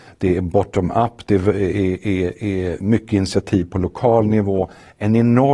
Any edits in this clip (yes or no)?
no